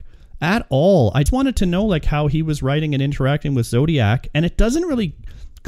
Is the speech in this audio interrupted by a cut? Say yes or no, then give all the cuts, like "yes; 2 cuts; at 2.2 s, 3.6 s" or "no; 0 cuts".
yes; 1 cut; at 1.3 s